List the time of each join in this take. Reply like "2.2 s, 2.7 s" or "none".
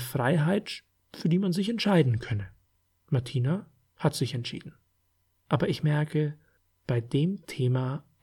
none